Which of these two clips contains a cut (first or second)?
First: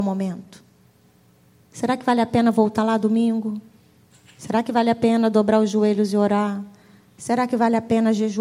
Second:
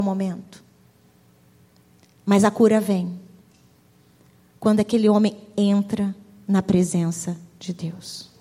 first